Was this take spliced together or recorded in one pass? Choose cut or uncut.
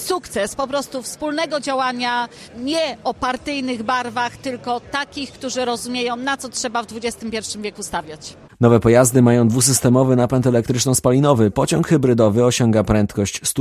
uncut